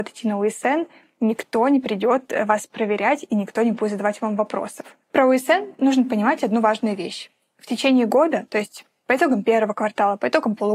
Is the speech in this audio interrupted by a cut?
no; 0 cuts

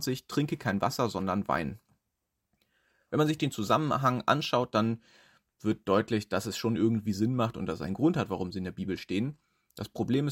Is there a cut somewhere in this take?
no; 0 cuts

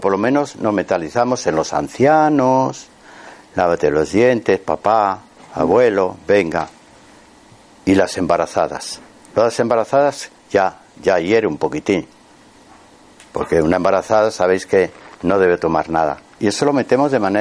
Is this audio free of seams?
no; 1 cut; at 16.4 s

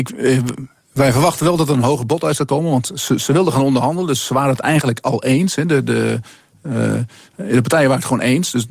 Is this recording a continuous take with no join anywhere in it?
yes; 0 cuts

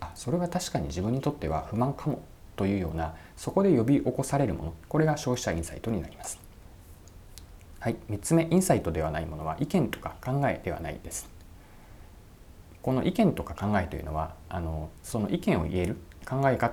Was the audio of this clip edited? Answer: no; 0 cuts

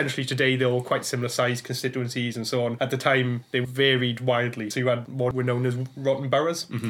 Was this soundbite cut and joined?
no; 0 cuts

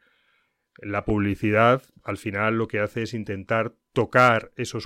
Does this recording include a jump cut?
no; 0 cuts

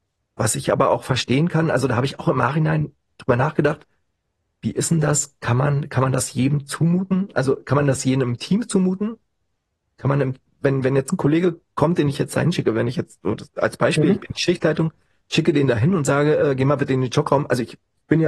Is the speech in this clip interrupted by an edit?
no; 0 cuts

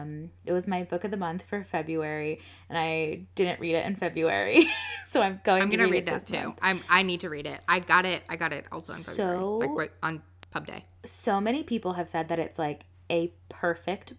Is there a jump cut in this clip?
no; 0 cuts

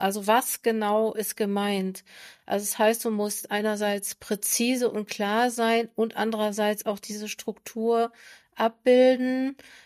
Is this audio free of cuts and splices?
yes; 0 cuts

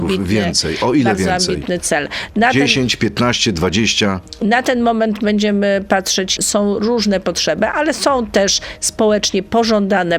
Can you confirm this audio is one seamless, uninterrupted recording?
no; 1 cut; at 6.4 s

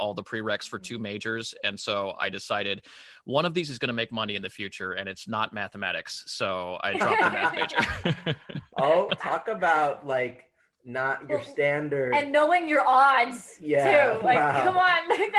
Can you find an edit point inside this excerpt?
yes; 1 cut; at 9.1 s

